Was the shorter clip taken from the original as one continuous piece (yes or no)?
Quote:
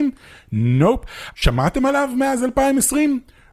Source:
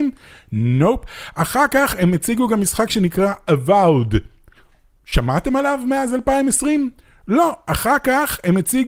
no